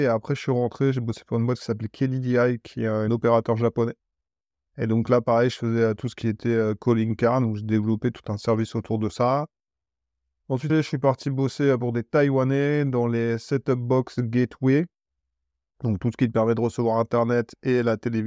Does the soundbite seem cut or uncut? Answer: cut